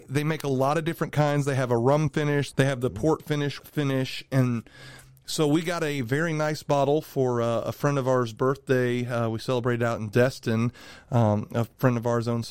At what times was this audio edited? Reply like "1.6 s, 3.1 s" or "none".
2.5 s, 3.6 s